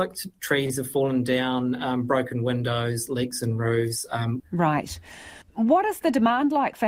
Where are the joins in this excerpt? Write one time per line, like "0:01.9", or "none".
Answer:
0:04.4